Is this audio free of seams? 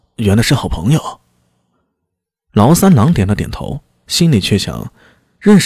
yes; 0 cuts

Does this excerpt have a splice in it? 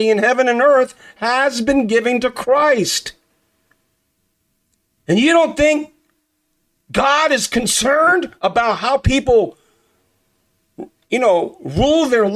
yes; 1 cut; at 5.0 s

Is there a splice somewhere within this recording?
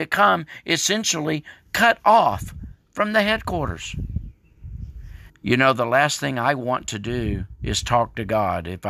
yes; 1 cut; at 5.3 s

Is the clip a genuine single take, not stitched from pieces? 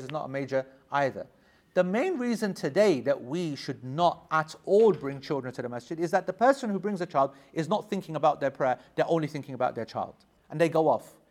no; 1 cut; at 10.4 s

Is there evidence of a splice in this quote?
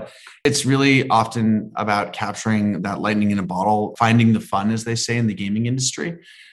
no; 0 cuts

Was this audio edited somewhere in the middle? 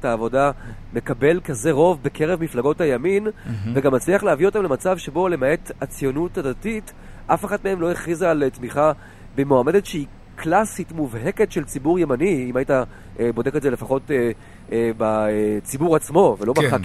no; 0 cuts

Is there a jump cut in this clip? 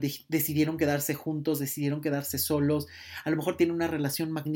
no; 0 cuts

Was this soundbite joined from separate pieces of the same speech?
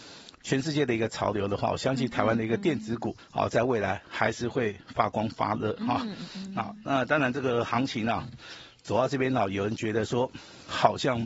yes; 1 cut; at 3.2 s

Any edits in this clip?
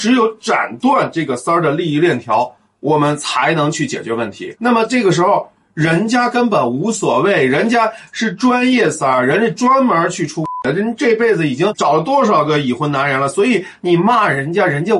yes; 1 cut; at 4.6 s

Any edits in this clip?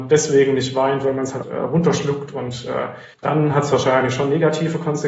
yes; 2 cuts; at 1.4 s, 3.1 s

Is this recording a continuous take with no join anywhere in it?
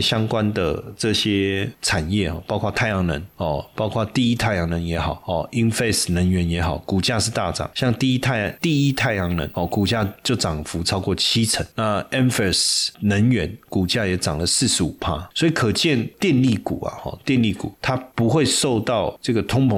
yes; 0 cuts

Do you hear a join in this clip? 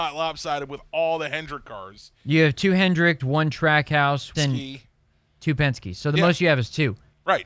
yes; 2 cuts; at 3.2 s, 4.3 s

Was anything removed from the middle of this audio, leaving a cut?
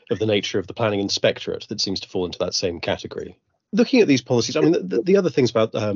no; 0 cuts

